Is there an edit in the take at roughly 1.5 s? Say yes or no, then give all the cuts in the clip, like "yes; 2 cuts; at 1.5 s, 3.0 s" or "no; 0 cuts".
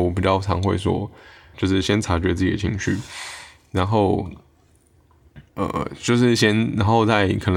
yes; 2 cuts; at 1.5 s, 5.5 s